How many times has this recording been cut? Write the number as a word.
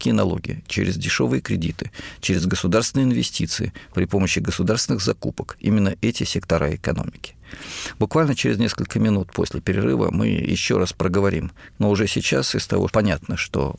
two